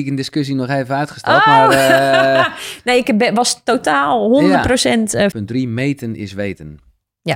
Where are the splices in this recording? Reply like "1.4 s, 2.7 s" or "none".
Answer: 3.0 s, 5.3 s